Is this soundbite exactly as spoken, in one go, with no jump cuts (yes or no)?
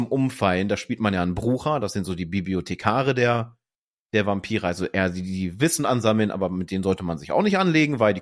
yes